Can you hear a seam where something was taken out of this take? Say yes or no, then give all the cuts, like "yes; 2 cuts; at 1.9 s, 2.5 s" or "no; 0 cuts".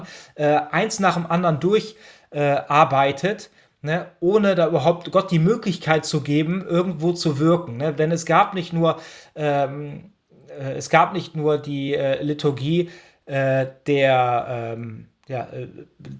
no; 0 cuts